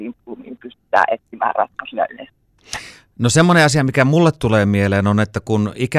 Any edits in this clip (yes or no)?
no